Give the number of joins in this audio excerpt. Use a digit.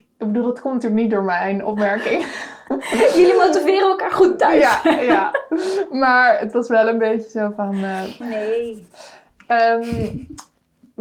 1